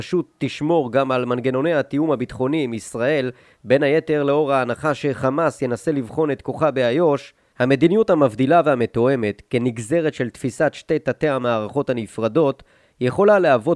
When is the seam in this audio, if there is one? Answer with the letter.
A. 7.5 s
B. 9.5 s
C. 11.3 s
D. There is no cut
A